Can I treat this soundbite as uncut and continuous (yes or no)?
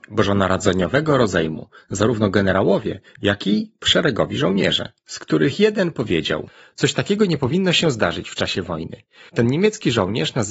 no